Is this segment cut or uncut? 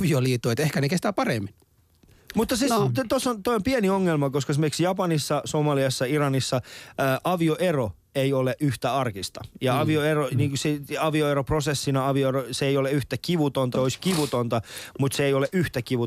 cut